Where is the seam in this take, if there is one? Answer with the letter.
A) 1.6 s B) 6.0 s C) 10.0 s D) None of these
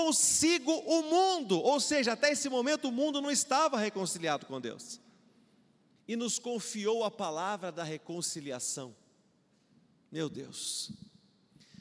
B